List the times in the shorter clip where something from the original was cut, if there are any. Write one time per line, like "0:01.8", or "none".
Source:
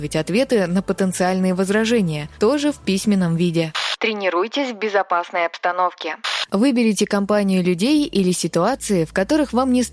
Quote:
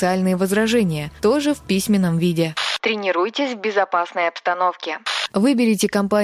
none